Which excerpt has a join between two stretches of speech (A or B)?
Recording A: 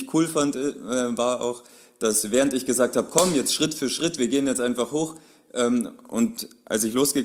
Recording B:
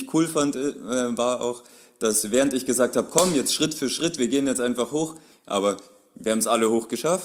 B